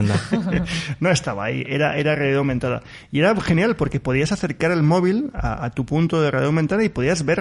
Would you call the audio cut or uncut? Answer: uncut